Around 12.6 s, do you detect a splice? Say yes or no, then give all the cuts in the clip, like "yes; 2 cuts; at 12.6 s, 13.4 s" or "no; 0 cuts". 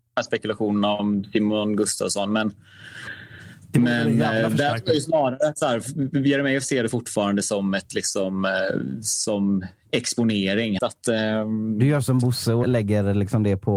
yes; 2 cuts; at 10.8 s, 12.6 s